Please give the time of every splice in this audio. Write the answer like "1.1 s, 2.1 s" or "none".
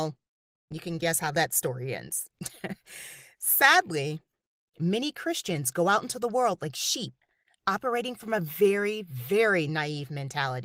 none